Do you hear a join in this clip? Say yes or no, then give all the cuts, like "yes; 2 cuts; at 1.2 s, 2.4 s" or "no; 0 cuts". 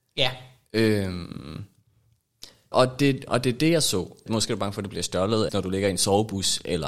yes; 3 cuts; at 2.7 s, 4.3 s, 5.5 s